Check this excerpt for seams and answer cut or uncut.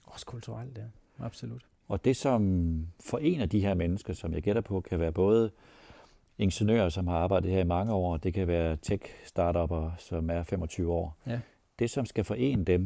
uncut